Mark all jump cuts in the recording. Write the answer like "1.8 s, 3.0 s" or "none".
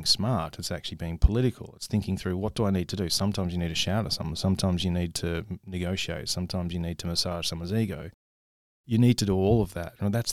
none